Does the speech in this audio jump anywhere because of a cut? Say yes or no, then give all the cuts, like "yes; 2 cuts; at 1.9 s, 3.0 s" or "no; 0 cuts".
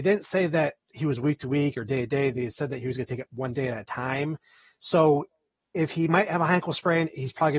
no; 0 cuts